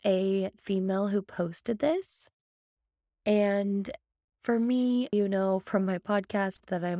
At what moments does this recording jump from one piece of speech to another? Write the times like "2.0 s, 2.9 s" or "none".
5.1 s